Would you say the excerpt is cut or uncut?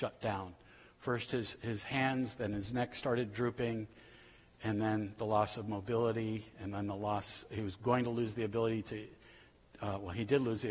uncut